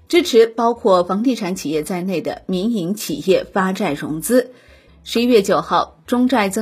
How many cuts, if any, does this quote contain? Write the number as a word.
one